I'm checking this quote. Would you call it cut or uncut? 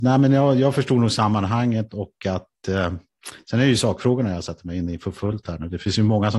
uncut